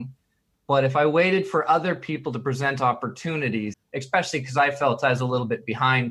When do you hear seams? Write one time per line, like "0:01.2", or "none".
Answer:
0:03.7